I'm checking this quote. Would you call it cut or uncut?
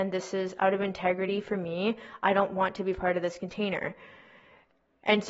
uncut